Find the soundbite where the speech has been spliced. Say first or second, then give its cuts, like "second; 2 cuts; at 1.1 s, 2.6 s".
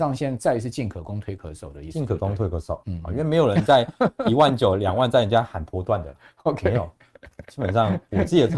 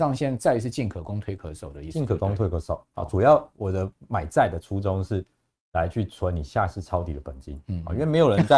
first; 1 cut; at 2.8 s